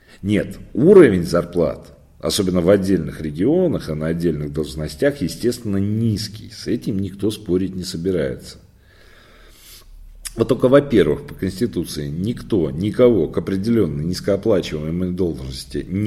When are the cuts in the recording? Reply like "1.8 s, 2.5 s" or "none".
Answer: none